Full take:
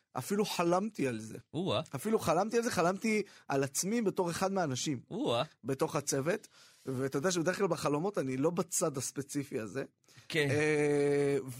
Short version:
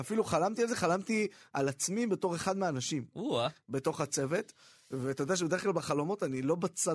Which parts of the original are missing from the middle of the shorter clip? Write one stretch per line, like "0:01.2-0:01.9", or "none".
none

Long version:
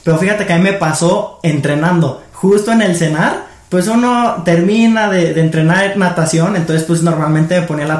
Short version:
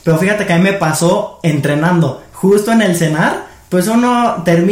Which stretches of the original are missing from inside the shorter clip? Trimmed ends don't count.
none

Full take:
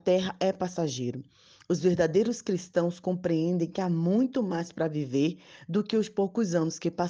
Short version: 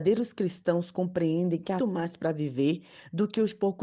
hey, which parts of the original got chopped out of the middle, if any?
0:03.9-0:04.3

